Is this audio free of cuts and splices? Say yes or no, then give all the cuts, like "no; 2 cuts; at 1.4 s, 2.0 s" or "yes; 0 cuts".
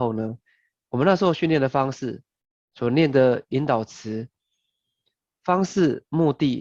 yes; 0 cuts